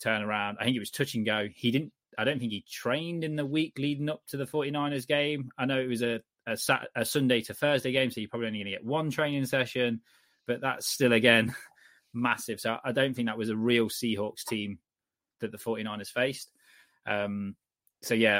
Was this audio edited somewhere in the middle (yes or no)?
no